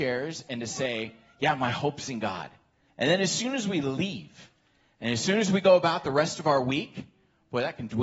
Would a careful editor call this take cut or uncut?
cut